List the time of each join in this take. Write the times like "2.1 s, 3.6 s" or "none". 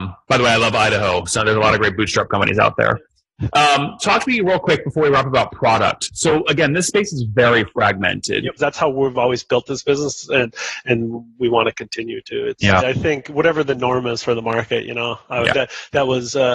8.6 s, 12.8 s, 15.5 s

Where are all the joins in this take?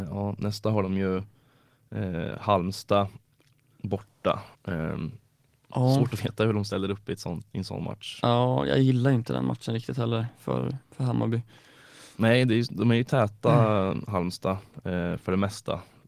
4.5 s

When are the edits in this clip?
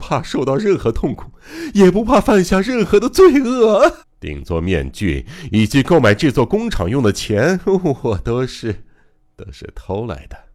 4.0 s

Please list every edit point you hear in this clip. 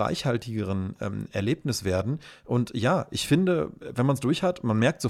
none

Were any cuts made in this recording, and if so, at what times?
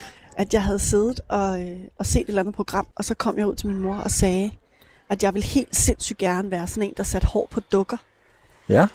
2.9 s

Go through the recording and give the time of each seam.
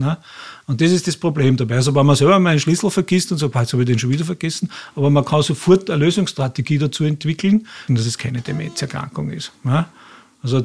7.9 s

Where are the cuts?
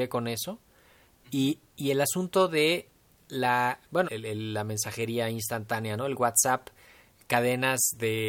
4.0 s

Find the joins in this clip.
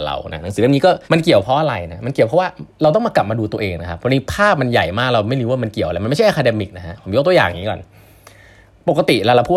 1.0 s

